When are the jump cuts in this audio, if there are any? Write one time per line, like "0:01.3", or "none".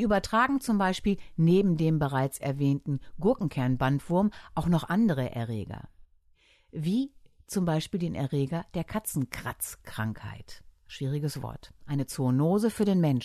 none